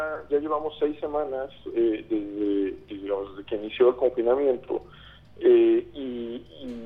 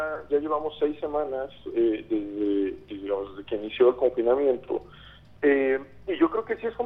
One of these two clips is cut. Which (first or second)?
second